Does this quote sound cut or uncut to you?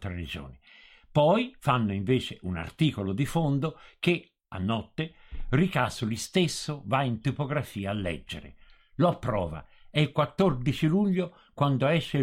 uncut